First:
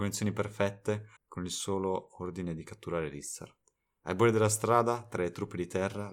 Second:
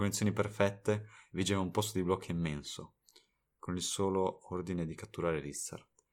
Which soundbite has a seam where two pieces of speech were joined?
first; 1 cut; at 1.2 s

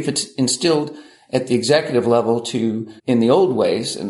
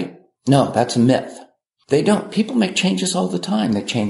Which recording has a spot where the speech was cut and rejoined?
first; 1 cut; at 3.0 s

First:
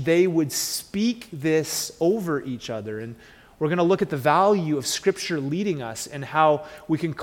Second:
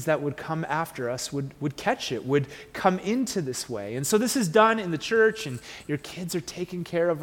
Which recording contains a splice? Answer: second; 1 cut; at 1.5 s

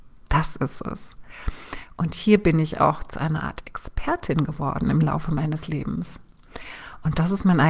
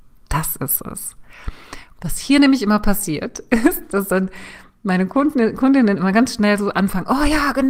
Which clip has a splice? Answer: second; 1 cut; at 2.0 s

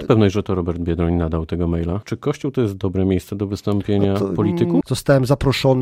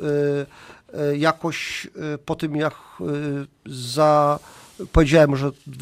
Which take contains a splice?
first; 2 cuts; at 2.0 s, 4.8 s

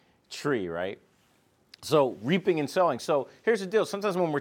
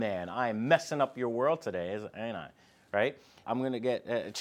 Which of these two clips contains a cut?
second; 1 cut; at 3.4 s

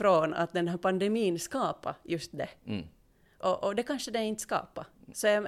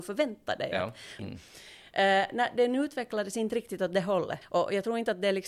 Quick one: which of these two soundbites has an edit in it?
second; 2 cuts; at 1.2 s, 4.4 s

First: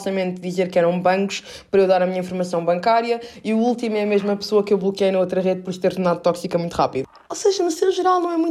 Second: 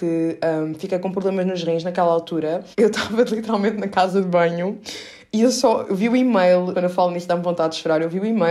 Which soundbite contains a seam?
second; 2 cuts; at 2.7 s, 6.7 s

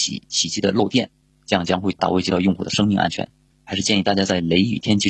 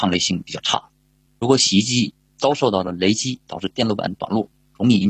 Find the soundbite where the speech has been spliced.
first; 2 cuts; at 2.0 s, 3.5 s

